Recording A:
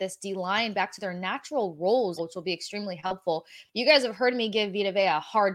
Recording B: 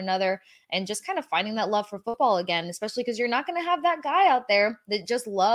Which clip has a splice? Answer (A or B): A